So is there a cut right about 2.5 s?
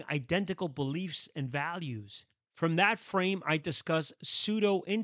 yes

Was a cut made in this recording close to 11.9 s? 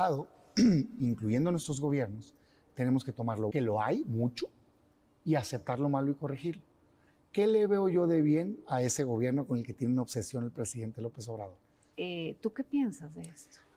yes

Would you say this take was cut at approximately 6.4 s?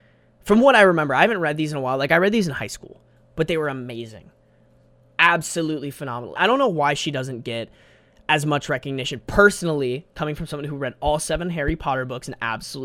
yes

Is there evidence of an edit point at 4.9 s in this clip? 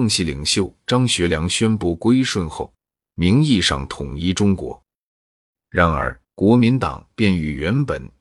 no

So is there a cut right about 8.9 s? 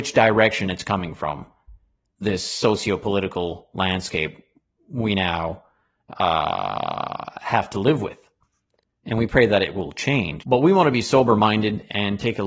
no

